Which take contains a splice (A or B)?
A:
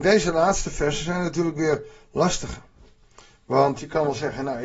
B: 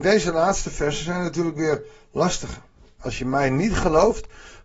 B